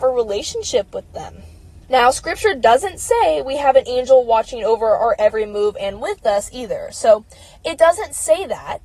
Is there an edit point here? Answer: yes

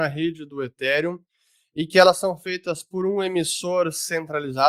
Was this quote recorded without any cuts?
yes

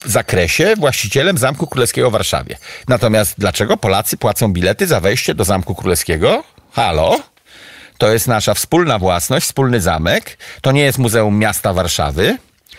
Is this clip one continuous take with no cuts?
no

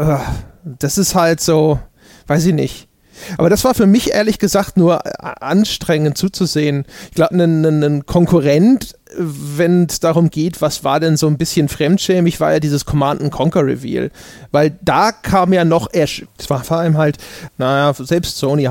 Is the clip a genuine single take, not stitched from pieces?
no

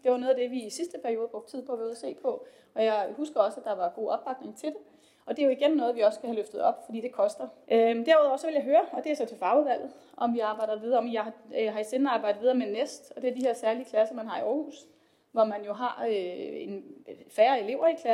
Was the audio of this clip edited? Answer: yes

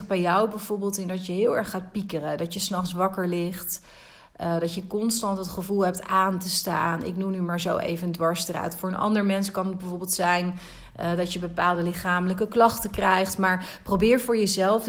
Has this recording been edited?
no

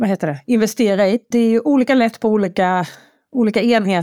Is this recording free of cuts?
no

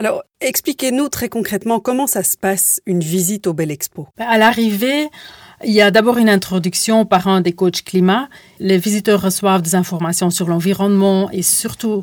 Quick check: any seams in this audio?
no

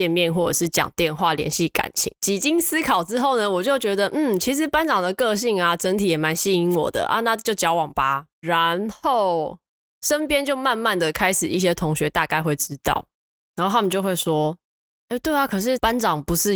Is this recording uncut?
no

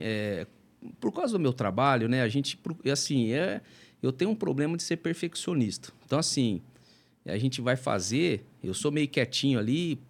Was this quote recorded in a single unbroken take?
yes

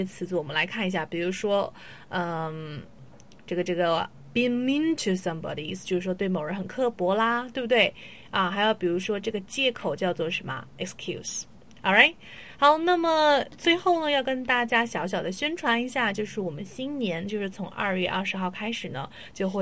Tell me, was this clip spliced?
no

